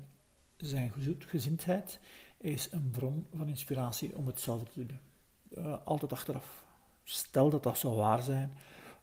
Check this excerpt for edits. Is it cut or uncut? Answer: cut